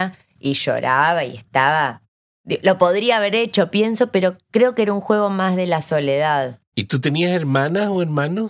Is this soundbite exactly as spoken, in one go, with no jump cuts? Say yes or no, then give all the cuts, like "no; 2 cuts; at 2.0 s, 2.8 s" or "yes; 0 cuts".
no; 1 cut; at 6.7 s